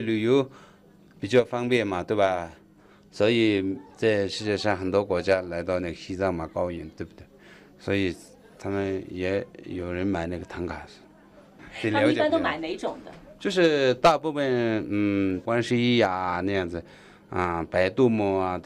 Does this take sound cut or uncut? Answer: uncut